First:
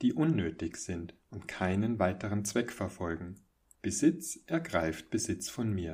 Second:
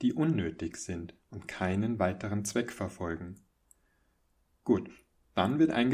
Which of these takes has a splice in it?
first; 1 cut; at 3.7 s

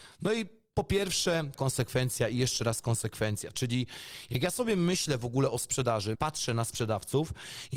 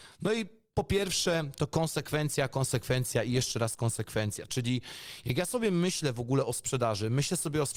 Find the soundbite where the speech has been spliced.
first; 2 cuts; at 1.5 s, 6.1 s

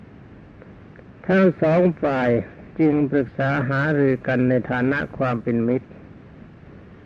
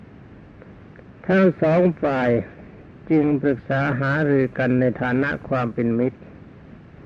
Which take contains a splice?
first; 1 cut; at 2.7 s

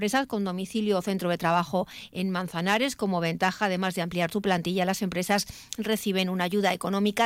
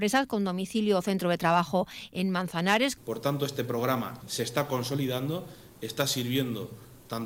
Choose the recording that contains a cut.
second; 2 cuts; at 3.0 s, 4.2 s

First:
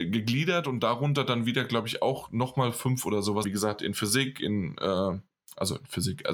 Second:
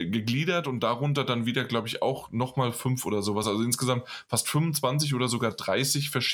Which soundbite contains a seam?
first; 1 cut; at 3.4 s

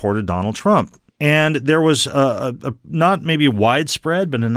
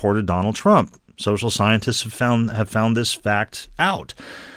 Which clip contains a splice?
first; 1 cut; at 1.1 s

